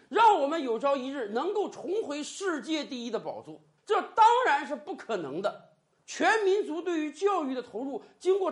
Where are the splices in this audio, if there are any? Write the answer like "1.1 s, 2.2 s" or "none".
3.8 s, 6.0 s